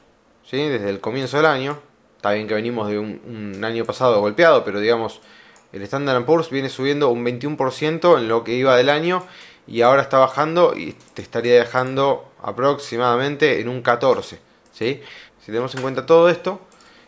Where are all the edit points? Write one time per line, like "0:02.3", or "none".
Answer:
0:15.3

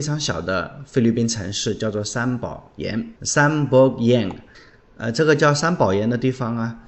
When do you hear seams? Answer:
0:03.2

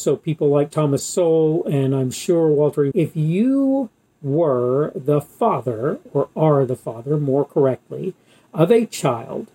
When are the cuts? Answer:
0:02.9

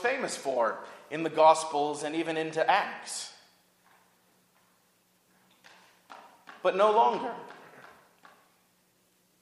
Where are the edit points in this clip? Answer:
none

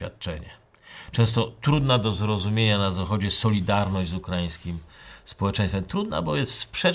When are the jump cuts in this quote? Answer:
none

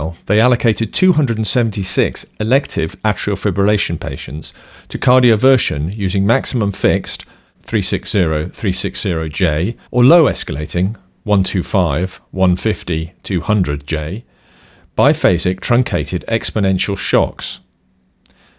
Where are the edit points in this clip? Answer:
0:07.5
0:09.9

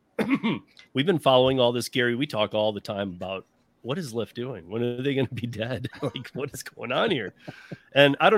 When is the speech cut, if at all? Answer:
none

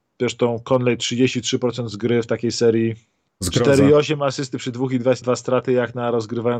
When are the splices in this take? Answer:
0:03.3
0:05.2

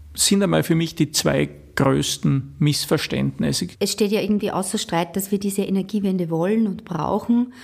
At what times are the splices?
0:03.7

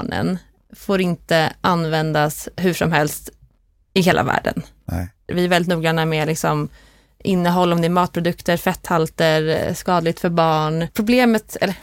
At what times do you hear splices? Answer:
0:05.3
0:10.9

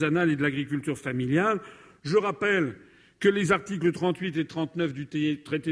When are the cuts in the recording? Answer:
none

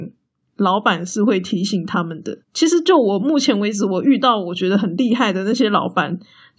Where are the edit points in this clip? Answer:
0:02.4

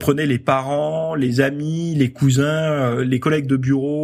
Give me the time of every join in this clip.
none

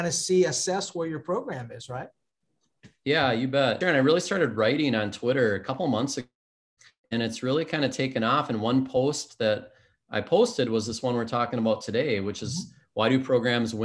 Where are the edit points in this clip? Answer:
0:03.8

